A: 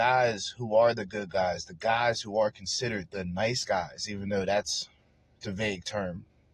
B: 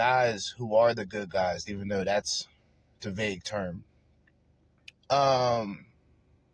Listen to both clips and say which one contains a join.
B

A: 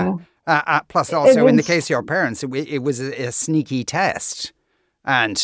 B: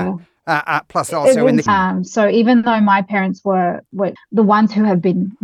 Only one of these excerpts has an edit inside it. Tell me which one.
B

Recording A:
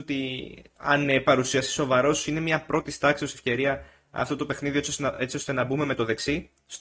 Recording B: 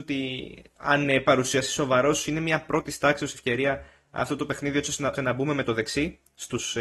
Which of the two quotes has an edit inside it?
B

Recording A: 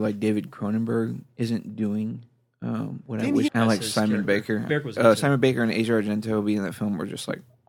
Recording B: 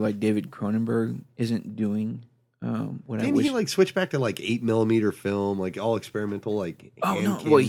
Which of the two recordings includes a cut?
A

